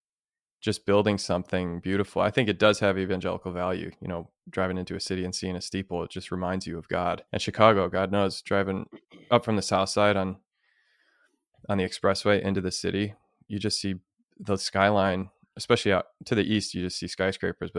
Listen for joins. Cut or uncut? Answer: cut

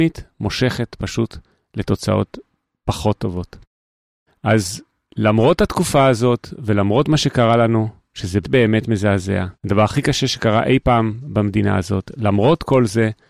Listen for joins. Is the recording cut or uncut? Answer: cut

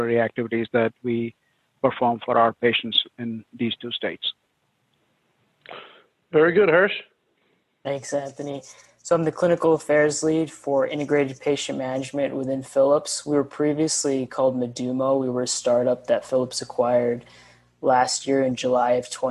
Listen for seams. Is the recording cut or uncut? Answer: uncut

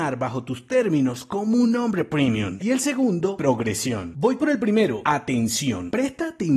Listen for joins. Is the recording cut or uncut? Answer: cut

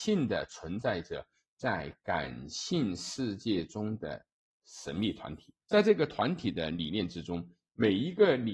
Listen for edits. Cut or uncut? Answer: cut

